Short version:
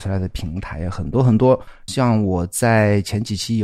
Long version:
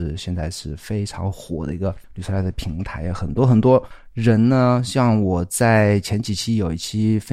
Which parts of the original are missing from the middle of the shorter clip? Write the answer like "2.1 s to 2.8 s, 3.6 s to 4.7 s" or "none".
4.1 s to 4.9 s